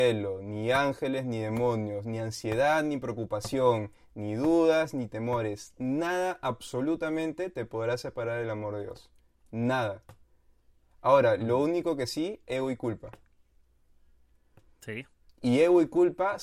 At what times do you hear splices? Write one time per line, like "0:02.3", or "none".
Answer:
none